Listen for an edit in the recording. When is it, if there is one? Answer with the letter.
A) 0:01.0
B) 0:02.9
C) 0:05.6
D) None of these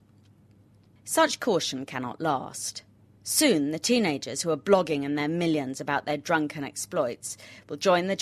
D